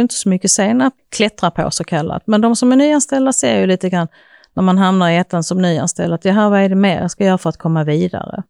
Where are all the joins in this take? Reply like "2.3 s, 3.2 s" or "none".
1.0 s